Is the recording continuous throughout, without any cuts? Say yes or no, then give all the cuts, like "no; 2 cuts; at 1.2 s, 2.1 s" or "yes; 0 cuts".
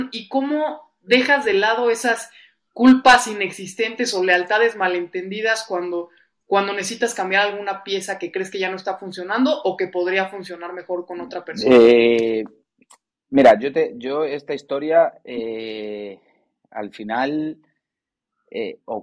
yes; 0 cuts